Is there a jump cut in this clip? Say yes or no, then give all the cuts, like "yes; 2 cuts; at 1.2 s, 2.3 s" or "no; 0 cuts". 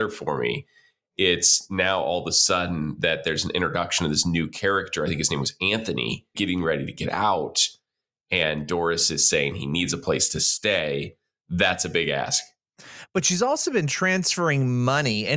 yes; 1 cut; at 6.3 s